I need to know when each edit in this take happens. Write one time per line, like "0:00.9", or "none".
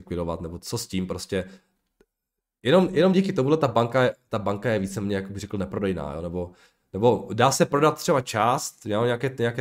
none